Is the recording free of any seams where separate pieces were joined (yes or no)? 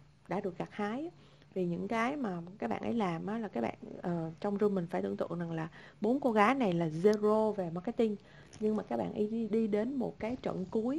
no